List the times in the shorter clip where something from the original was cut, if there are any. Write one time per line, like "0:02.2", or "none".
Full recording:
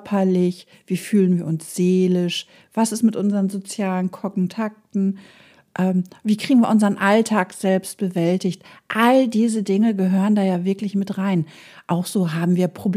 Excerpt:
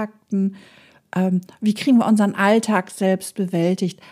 none

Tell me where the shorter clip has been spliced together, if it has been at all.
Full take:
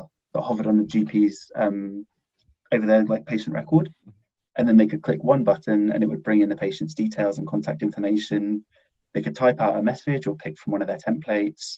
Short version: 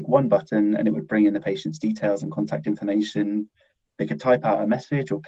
none

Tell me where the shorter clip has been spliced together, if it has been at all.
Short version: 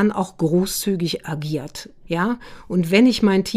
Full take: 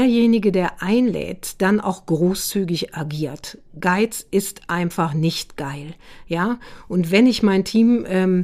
0:02.0

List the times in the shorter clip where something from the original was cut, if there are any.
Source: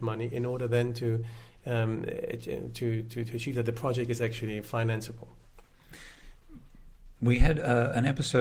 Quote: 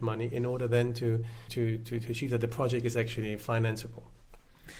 0:01.5

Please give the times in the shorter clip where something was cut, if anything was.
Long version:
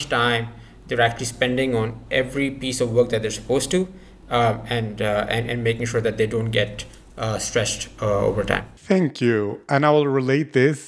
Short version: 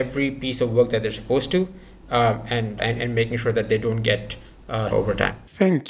0:02.8
0:04.9

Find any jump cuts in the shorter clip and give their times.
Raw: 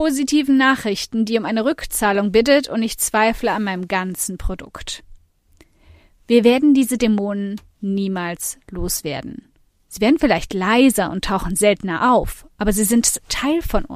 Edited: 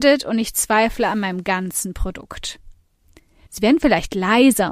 0:03.5

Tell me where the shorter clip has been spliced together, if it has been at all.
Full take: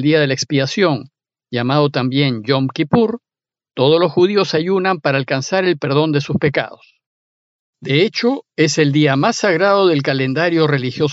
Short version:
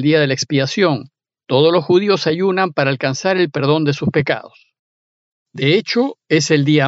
0:01.3

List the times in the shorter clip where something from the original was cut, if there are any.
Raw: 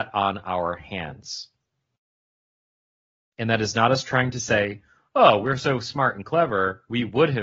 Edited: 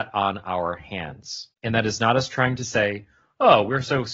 0:01.5

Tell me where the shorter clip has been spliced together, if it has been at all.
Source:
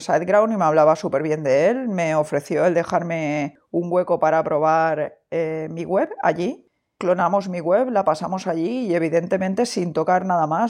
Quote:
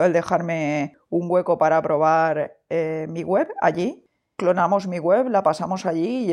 none

